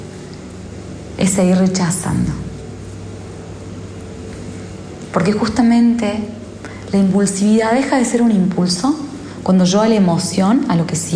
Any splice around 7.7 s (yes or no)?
no